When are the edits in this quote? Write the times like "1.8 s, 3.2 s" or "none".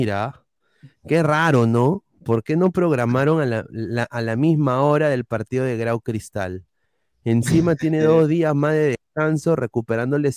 none